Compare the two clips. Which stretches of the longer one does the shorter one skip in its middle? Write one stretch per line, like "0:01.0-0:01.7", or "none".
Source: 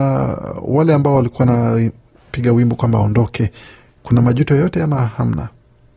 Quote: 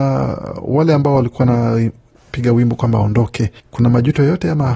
0:03.6-0:03.9